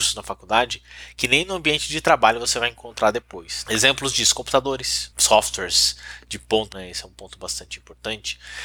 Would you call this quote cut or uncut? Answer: cut